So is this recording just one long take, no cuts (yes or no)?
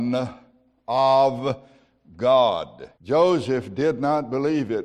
no